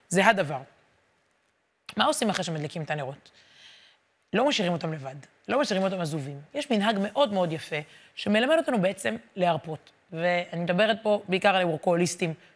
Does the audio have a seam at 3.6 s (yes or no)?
no